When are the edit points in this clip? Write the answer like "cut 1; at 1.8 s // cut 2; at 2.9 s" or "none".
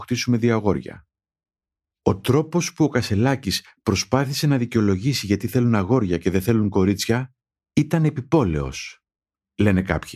none